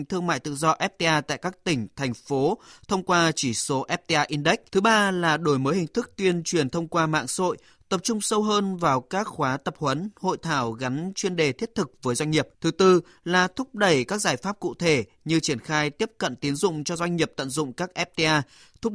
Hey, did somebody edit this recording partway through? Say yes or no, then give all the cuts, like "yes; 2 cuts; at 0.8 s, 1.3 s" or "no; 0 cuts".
yes; 2 cuts; at 4.7 s, 12.5 s